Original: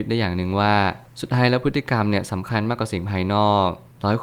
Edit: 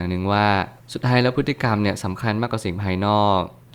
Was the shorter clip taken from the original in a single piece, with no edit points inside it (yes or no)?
yes